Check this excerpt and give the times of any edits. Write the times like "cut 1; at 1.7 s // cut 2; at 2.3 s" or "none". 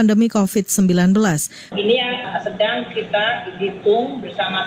cut 1; at 1.7 s